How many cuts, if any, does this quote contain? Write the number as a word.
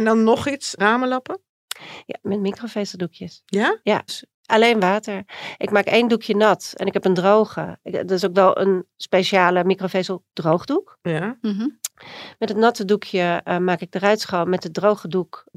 one